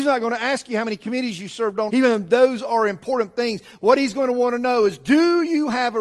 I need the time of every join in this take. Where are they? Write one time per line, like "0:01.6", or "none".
0:01.9